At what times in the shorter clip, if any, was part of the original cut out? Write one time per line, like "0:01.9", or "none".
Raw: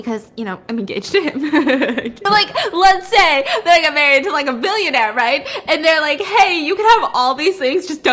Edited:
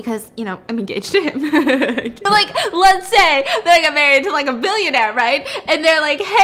none